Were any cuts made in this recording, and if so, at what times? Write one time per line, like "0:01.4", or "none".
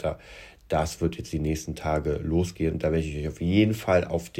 none